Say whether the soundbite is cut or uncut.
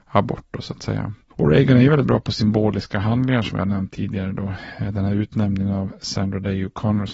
uncut